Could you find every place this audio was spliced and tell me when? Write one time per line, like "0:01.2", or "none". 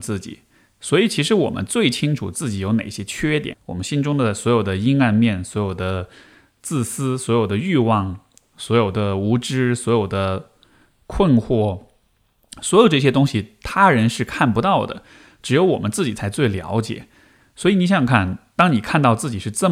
0:03.5